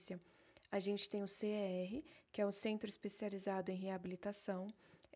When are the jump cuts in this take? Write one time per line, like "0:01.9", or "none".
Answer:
none